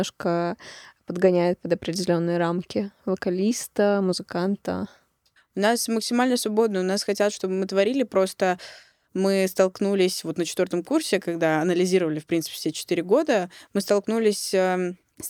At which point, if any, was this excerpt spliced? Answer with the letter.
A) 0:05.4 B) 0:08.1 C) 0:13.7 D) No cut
A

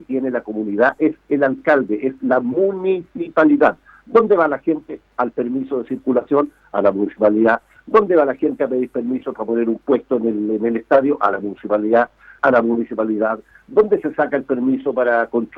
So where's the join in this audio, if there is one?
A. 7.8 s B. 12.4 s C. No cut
B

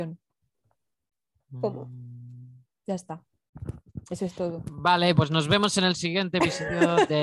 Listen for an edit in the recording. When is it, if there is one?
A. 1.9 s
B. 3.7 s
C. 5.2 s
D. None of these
C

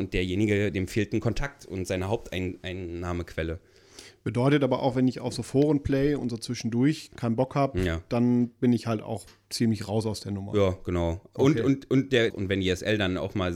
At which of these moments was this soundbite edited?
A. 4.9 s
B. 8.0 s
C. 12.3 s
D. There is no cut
C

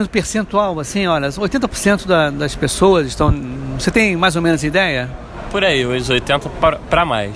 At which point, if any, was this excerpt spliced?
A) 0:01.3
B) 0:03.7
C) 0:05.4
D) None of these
D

